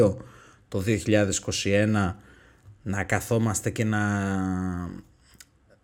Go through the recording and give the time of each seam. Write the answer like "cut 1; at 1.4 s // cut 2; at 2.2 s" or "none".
none